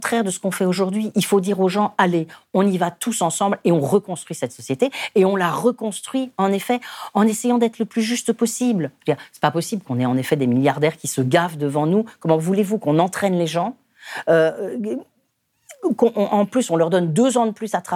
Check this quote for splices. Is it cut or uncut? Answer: uncut